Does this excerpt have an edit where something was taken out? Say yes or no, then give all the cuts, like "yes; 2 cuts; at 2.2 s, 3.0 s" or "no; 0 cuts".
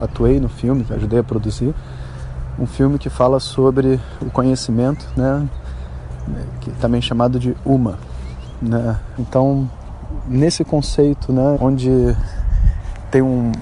yes; 2 cuts; at 9.2 s, 11.6 s